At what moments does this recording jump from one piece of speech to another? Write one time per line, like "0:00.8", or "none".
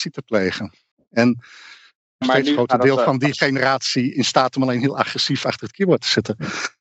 0:02.2